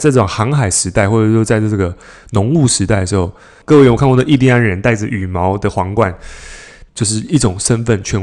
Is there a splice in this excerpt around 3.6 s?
yes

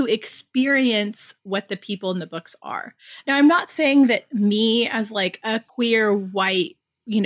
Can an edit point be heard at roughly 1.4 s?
no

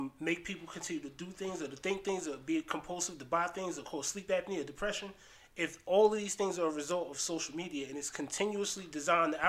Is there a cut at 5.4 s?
no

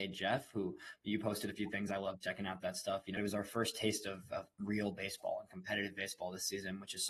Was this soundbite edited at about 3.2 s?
yes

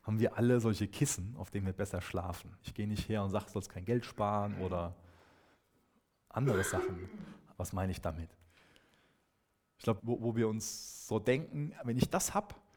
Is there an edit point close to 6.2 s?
no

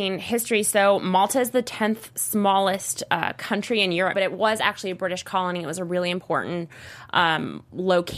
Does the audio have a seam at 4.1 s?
yes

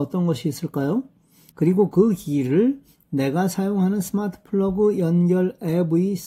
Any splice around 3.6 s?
no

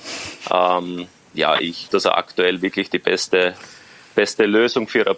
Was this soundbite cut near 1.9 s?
yes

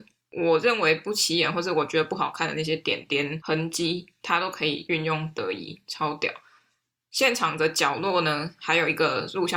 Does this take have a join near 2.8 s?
no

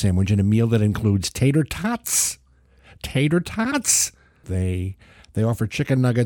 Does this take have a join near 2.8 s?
no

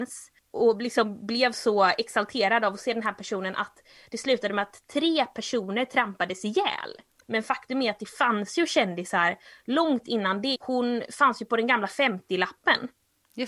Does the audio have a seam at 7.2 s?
yes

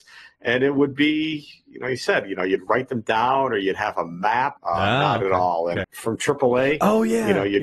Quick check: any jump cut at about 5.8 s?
yes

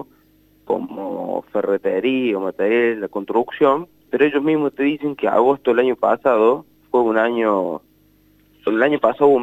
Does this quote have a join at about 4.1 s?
yes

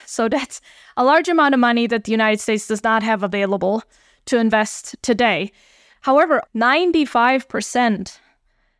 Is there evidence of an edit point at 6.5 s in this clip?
yes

